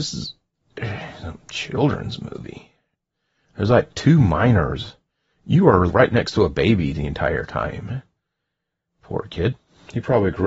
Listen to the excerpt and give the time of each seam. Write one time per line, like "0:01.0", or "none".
0:05.9